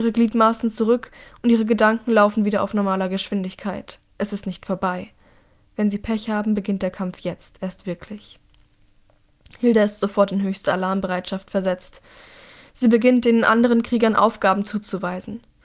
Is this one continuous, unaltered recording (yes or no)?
yes